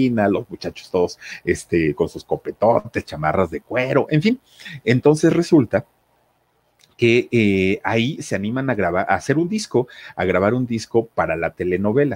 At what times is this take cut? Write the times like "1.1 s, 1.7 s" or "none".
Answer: none

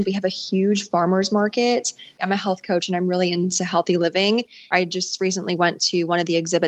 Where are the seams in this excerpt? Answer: 2.2 s, 4.7 s

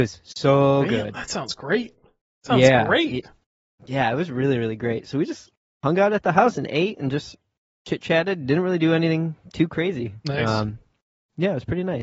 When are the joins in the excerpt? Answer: none

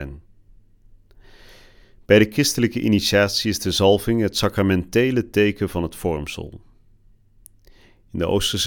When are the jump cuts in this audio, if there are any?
none

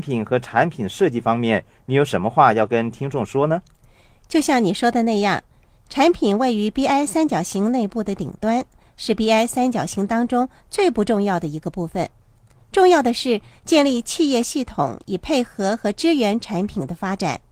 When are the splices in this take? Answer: none

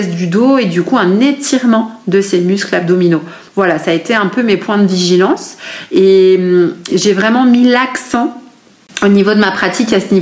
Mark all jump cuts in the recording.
none

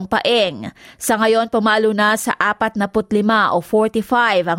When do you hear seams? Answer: none

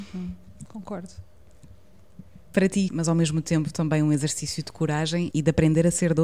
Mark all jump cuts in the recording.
2.9 s, 5.3 s

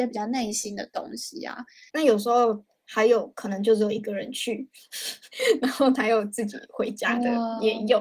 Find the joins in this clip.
1.9 s

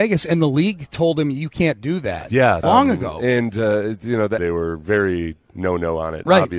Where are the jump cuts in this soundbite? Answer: 2.6 s, 4.4 s

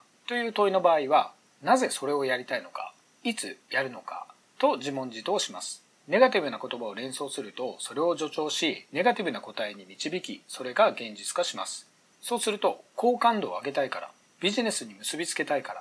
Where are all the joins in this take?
5.9 s, 12.1 s

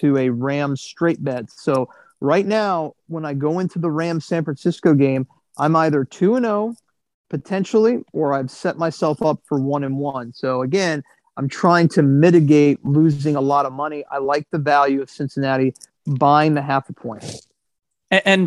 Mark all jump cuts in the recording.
none

